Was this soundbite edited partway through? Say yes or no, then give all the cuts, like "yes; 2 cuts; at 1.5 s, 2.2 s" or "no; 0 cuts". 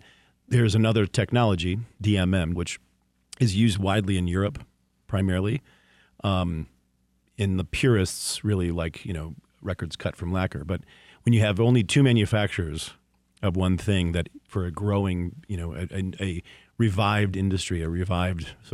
yes; 1 cut; at 2.6 s